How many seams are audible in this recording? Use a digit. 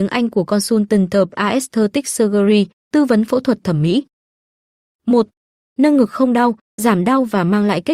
2